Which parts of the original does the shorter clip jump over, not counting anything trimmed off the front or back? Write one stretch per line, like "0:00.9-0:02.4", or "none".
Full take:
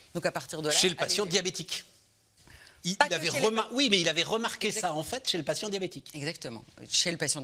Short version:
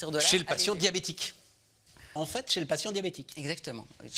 0:02.7-0:04.9